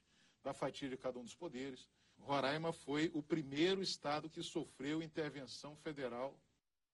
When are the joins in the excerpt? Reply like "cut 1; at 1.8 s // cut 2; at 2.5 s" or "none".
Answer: cut 1; at 2.1 s